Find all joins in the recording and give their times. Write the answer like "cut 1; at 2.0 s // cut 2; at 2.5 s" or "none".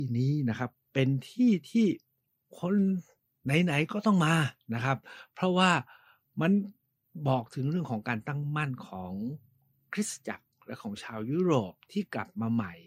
none